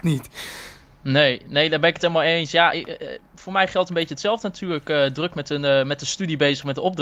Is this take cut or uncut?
uncut